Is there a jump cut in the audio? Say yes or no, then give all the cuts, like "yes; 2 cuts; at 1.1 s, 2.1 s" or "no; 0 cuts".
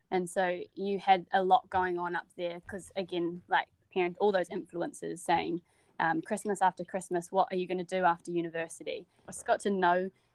yes; 1 cut; at 9.3 s